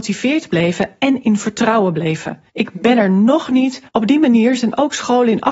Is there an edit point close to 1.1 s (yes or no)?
no